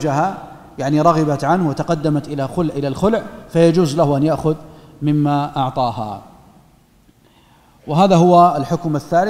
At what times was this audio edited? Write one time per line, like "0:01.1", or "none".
none